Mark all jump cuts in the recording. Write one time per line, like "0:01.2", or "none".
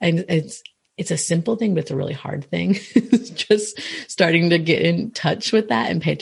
none